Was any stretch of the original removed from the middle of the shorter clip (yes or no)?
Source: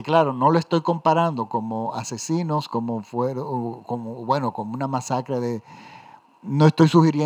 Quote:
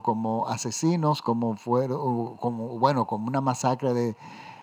no